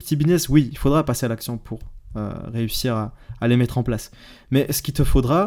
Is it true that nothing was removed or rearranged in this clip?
yes; 0 cuts

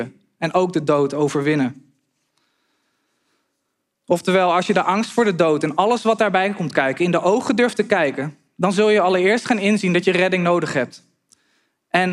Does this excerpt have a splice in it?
no; 0 cuts

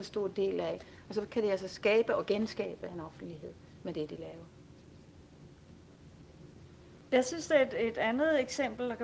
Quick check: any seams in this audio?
yes; 1 cut; at 1.0 s

